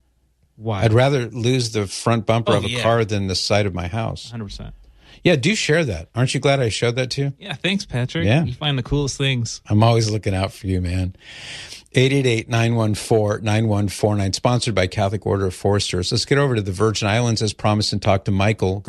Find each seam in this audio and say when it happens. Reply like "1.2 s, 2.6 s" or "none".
none